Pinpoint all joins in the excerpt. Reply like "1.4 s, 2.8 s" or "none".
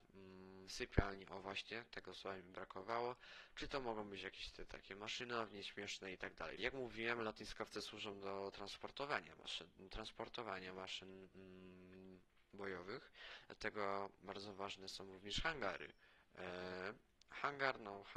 6.6 s